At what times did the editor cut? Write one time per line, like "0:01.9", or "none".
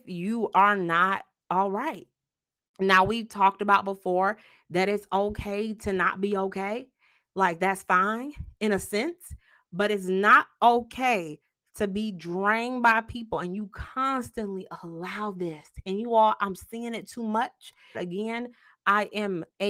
0:17.9